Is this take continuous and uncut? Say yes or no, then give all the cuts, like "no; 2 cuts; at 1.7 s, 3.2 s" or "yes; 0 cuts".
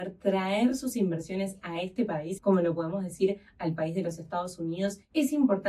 no; 1 cut; at 2.4 s